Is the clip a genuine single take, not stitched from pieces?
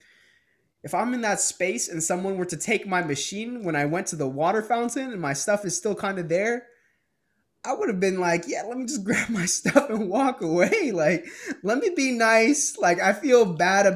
yes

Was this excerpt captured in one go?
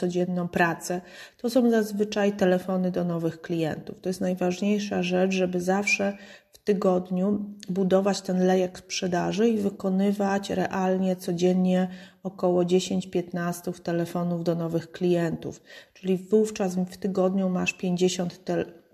yes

